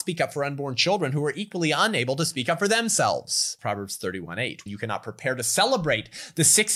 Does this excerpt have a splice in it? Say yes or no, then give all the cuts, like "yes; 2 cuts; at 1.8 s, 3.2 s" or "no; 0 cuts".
yes; 2 cuts; at 3.6 s, 4.7 s